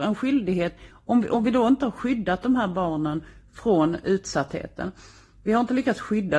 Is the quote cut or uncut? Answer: uncut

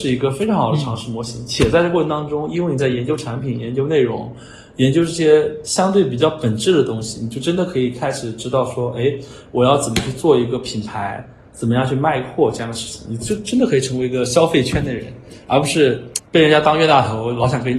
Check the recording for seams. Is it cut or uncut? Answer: uncut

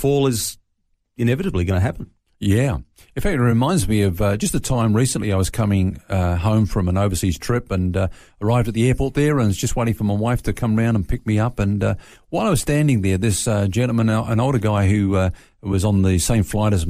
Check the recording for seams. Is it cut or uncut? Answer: uncut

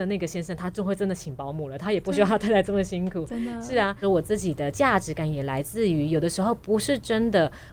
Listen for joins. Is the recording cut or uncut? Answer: cut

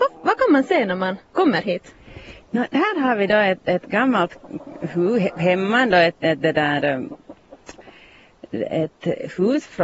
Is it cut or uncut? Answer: uncut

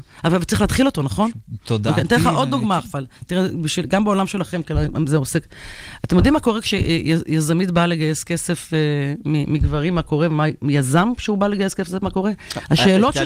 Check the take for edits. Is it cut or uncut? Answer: uncut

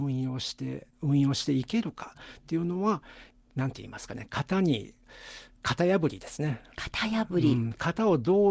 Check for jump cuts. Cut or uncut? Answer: cut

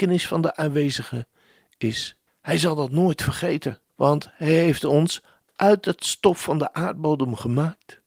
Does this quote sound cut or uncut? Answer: cut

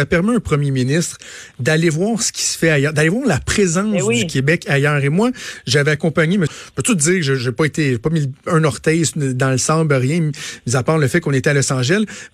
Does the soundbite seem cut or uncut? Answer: cut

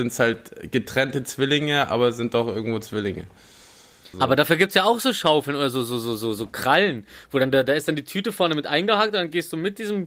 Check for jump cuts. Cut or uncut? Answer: cut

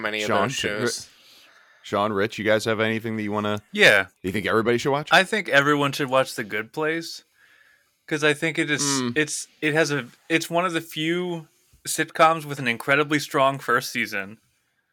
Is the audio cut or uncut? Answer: uncut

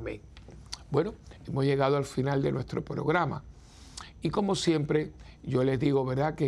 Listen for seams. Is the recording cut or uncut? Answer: uncut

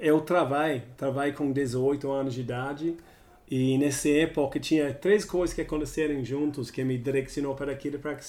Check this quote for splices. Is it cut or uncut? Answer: uncut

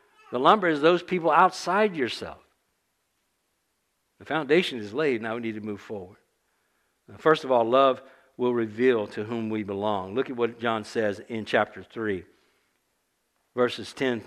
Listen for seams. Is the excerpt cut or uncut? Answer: uncut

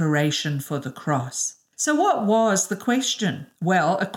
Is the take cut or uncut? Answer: uncut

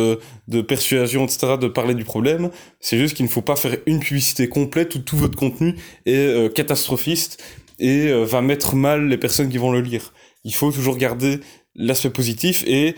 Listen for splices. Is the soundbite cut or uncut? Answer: uncut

